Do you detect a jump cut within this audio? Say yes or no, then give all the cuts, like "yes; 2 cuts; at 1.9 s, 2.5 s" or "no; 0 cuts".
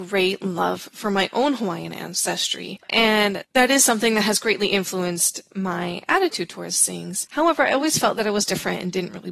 no; 0 cuts